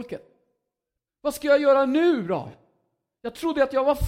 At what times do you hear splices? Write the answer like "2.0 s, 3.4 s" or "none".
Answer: 1.1 s